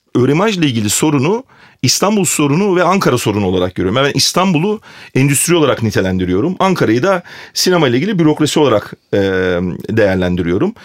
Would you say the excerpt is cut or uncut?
uncut